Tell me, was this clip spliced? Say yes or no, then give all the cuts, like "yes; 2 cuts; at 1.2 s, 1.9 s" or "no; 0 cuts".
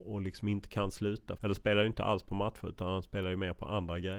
yes; 1 cut; at 1.4 s